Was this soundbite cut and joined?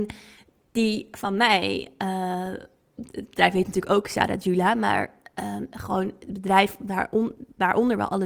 no; 0 cuts

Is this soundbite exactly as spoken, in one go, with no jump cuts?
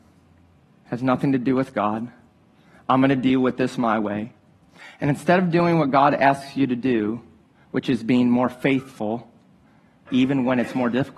no; 1 cut; at 10.1 s

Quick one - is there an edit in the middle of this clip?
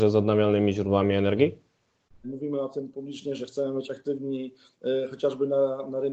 yes; 1 cut; at 2.2 s

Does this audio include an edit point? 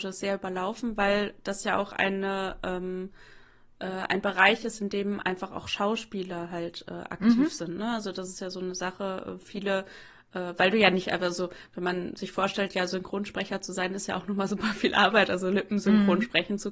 no; 0 cuts

